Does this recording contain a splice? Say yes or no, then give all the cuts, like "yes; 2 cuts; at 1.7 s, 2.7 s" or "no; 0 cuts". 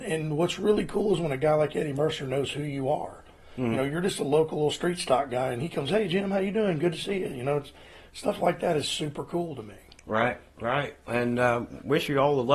no; 0 cuts